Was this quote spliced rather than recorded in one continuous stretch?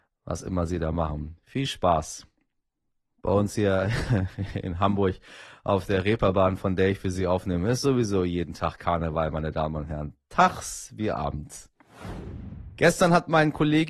no; 0 cuts

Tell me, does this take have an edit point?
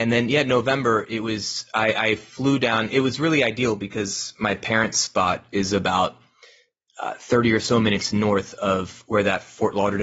no; 0 cuts

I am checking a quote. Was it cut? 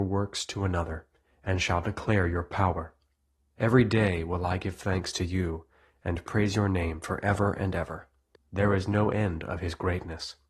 yes; 2 cuts; at 3.5 s, 8.4 s

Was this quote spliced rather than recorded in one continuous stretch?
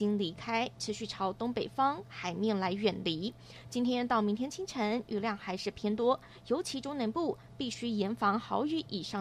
no; 0 cuts

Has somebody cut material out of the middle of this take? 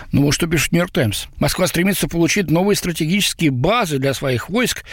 yes; 1 cut; at 1.4 s

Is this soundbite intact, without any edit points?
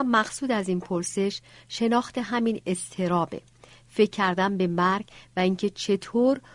yes; 0 cuts

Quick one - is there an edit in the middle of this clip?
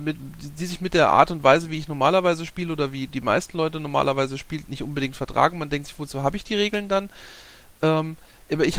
no; 0 cuts

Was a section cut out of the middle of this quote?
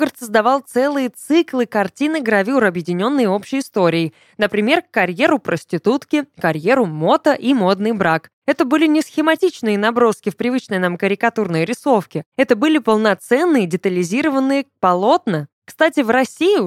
yes; 1 cut; at 8.4 s

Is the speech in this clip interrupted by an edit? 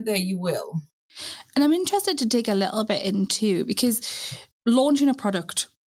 no; 0 cuts

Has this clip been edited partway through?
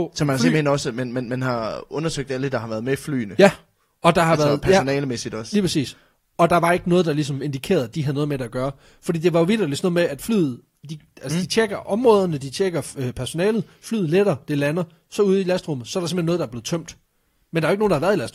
no; 0 cuts

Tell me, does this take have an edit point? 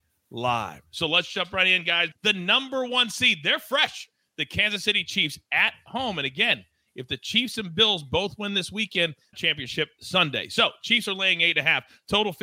yes; 2 cuts; at 2.1 s, 9.3 s

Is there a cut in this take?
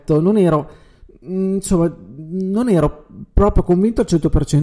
no; 0 cuts

